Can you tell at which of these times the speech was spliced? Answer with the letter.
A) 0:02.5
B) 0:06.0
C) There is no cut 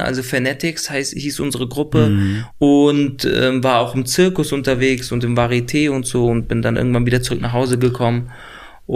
A